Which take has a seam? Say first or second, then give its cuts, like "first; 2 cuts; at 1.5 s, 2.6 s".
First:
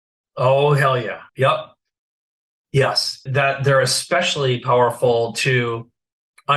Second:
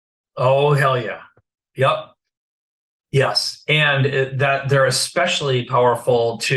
first; 2 cuts; at 1.3 s, 3.3 s